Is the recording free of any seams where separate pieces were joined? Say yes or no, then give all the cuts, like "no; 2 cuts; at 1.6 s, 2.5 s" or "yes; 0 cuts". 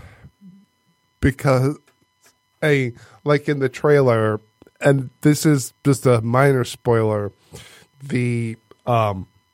yes; 0 cuts